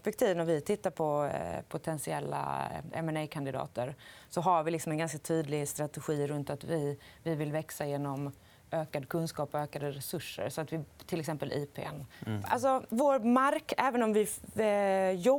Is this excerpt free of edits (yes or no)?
no